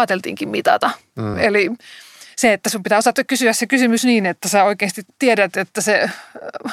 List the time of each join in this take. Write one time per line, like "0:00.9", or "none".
0:01.3

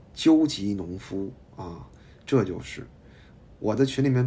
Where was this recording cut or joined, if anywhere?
none

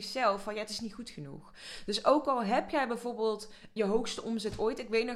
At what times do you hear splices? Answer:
0:03.8

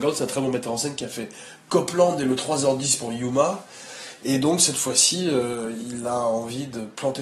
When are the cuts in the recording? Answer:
none

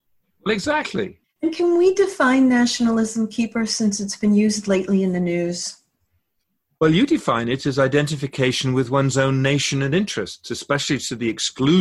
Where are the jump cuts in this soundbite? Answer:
0:01.2

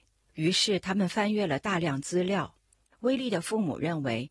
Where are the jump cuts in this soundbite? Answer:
0:02.8

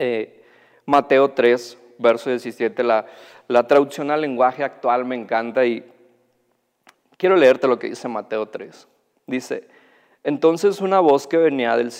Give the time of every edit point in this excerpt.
none

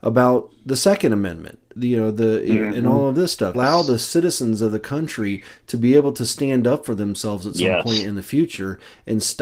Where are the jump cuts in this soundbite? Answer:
0:03.5

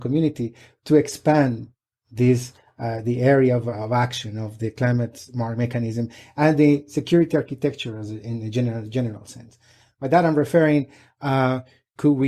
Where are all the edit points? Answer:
none

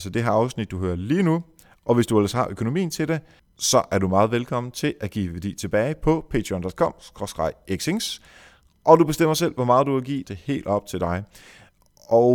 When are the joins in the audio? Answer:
0:10.2

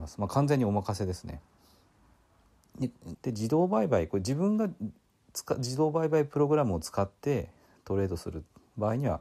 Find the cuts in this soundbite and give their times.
0:03.1

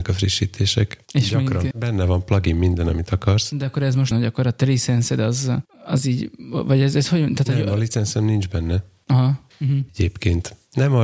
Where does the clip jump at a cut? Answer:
0:01.7
0:04.1
0:09.5

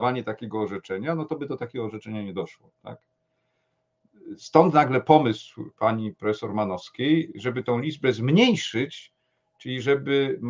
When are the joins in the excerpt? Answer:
none

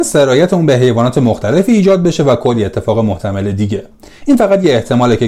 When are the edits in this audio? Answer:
none

